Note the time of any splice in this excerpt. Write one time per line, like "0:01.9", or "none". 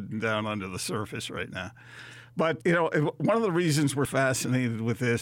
0:02.6
0:04.1